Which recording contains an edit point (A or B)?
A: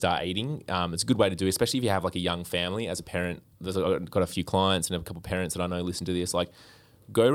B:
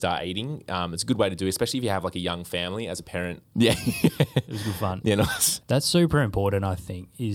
B